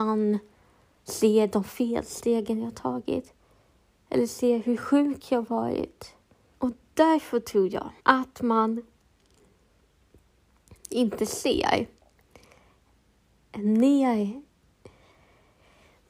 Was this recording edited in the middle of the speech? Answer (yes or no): yes